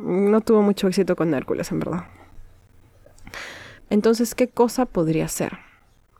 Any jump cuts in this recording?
yes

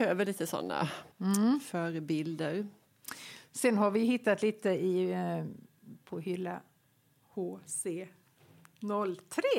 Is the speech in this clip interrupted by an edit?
yes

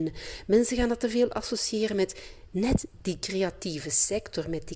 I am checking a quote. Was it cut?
no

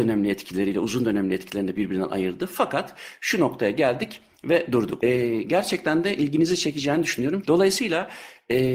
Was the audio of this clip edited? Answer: yes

